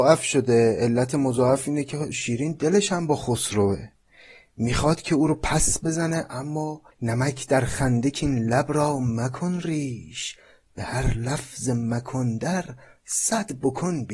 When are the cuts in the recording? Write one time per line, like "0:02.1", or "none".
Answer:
0:06.9